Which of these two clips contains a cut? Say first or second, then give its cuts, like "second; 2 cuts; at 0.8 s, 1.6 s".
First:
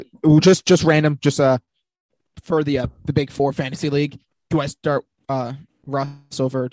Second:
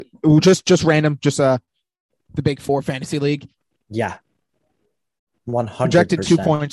second; 2 cuts; at 2.3 s, 3.7 s